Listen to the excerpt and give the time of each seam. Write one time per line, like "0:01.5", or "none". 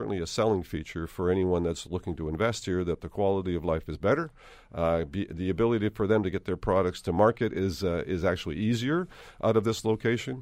none